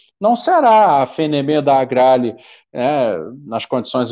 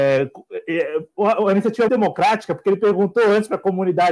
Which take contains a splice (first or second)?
second